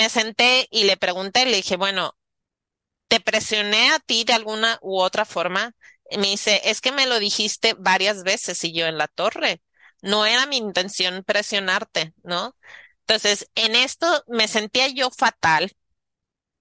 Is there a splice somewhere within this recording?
no; 0 cuts

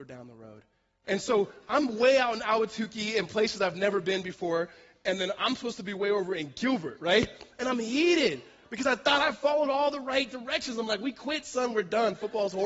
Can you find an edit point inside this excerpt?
yes; 1 cut; at 1.0 s

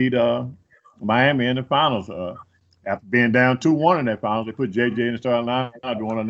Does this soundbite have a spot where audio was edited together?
no; 0 cuts

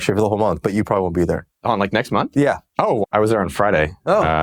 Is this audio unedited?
no; 1 cut; at 3.0 s

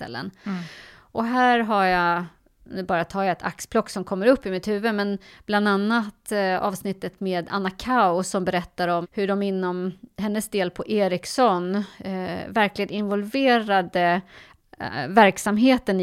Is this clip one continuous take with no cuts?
no; 1 cut; at 9.0 s

